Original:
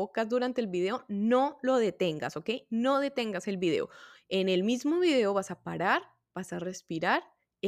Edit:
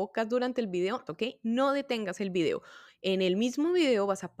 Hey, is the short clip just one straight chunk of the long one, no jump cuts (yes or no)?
no